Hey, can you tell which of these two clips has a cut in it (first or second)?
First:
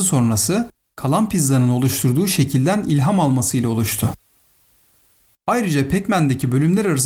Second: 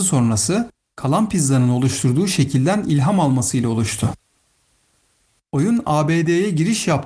first